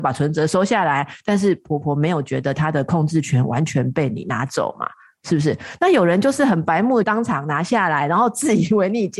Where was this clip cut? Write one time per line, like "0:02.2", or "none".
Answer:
none